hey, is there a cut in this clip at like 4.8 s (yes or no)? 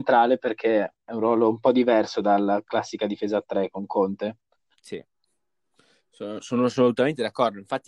no